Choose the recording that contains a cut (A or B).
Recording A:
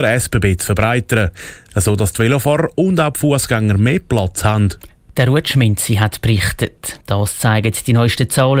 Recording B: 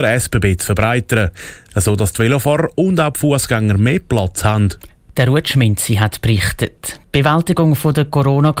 A